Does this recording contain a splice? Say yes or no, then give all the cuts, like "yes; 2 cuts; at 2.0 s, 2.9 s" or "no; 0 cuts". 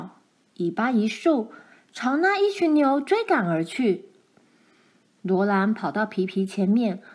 no; 0 cuts